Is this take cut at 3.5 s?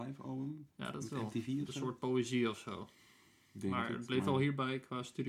no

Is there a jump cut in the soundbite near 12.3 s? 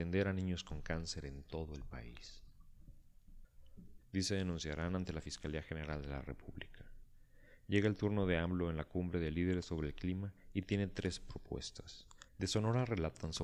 yes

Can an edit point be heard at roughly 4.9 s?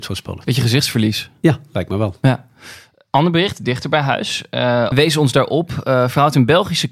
yes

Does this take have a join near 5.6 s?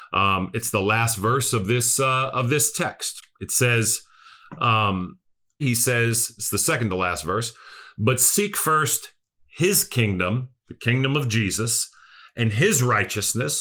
yes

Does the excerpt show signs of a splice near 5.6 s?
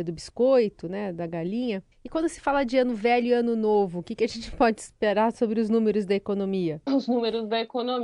no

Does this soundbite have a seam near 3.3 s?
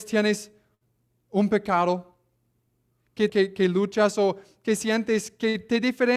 yes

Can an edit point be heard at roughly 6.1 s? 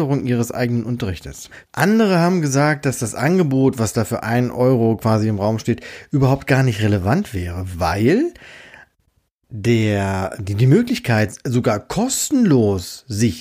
no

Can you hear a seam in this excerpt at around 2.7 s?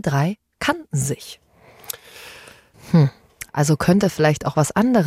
yes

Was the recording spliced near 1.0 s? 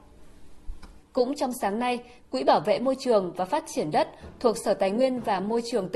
yes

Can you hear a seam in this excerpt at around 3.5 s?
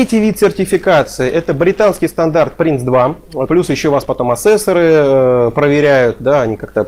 yes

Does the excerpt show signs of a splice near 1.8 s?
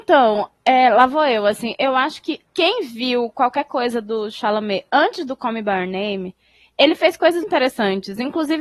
no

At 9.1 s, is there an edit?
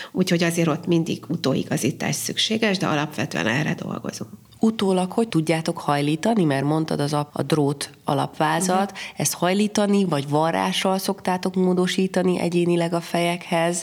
no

